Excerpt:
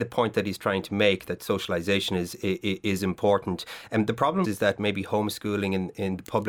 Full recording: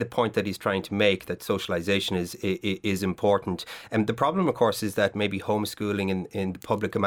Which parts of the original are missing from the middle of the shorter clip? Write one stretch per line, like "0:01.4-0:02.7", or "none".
0:04.4-0:04.8